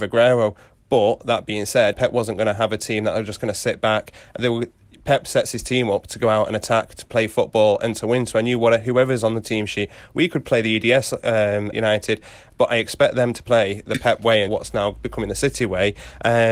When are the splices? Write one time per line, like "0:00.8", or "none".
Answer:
0:01.9
0:11.7
0:14.5

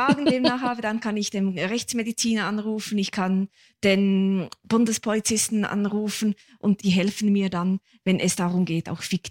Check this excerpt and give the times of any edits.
none

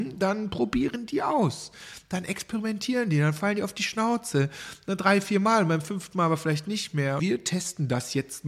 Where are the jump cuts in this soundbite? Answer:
0:07.2

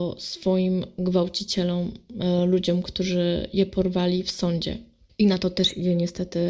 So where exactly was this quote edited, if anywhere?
none

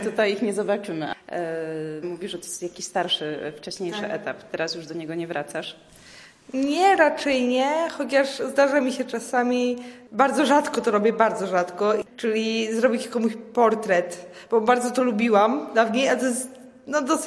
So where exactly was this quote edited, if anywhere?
0:02.0

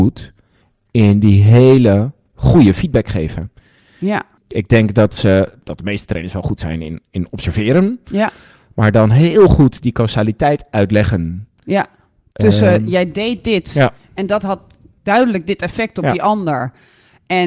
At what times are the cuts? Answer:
none

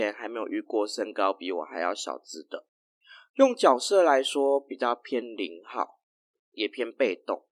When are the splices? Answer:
none

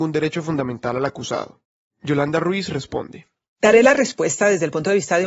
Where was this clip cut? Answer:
none

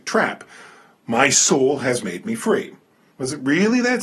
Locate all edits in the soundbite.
0:03.1

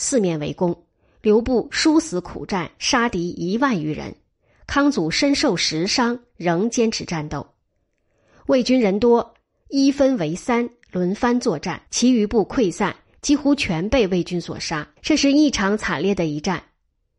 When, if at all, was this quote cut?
0:11.9
0:15.0

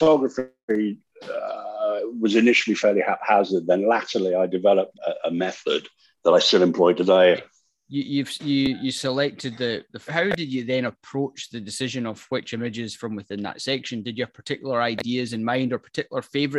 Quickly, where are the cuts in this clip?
0:04.9
0:07.3
0:10.1

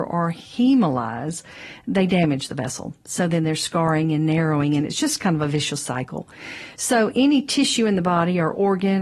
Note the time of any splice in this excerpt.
none

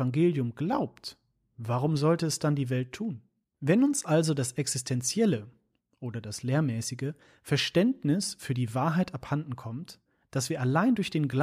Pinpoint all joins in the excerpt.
0:03.4

